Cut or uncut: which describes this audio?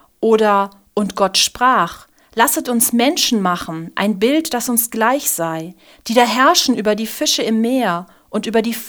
uncut